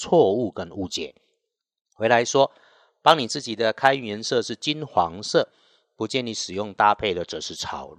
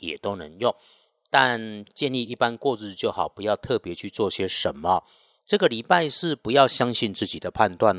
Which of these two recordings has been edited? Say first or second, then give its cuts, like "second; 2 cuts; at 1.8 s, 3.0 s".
second; 1 cut; at 5.4 s